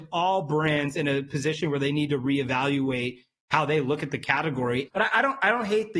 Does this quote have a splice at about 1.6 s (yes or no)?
no